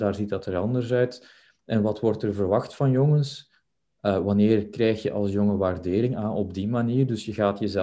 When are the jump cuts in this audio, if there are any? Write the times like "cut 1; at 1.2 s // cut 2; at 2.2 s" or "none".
none